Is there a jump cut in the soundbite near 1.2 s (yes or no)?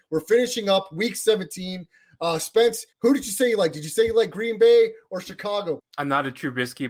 no